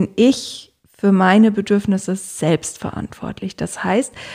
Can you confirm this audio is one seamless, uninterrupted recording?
yes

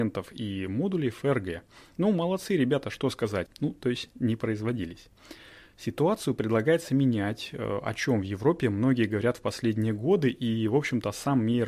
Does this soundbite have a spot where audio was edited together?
yes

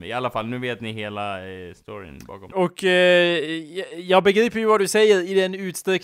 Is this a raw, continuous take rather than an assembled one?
no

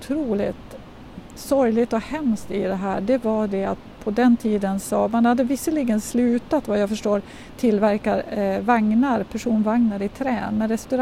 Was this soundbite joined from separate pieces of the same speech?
no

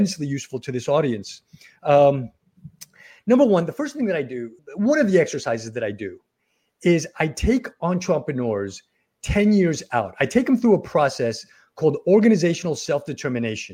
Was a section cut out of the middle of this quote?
yes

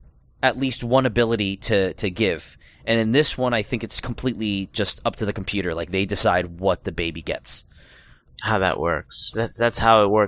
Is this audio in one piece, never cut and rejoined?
no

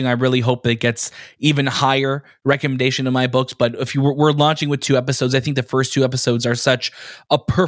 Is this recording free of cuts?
yes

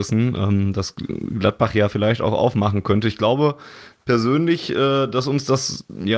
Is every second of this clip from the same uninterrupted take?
yes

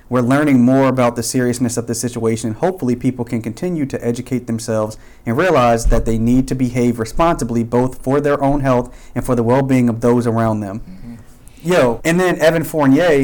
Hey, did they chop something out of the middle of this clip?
yes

